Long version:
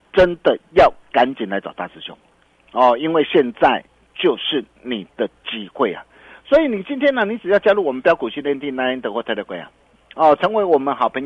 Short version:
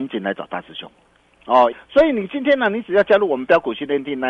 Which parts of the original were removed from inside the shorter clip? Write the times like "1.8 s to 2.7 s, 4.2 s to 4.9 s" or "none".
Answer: 3.0 s to 6.3 s